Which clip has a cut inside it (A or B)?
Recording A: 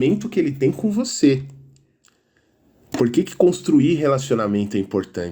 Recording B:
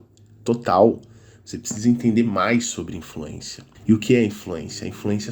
B